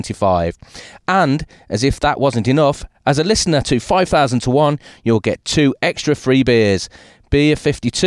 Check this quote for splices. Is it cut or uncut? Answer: uncut